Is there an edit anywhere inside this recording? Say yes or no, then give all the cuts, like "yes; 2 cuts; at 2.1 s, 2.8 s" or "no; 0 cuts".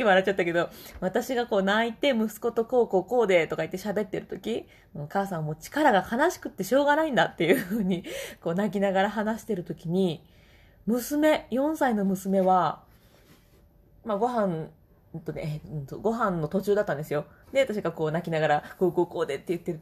yes; 1 cut; at 17.4 s